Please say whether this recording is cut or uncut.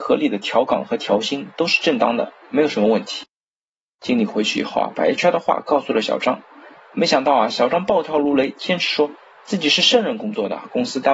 uncut